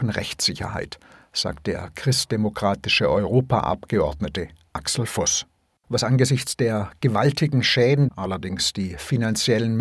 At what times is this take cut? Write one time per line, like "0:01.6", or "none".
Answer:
0:05.8
0:08.1